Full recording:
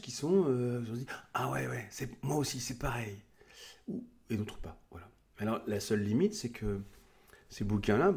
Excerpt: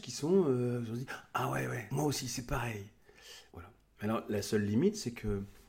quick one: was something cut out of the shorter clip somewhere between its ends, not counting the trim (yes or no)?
yes